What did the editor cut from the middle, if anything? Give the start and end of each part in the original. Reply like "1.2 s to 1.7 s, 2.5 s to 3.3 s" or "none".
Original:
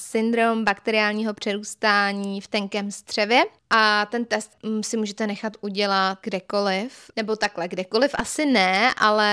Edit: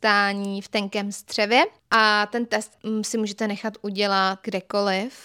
none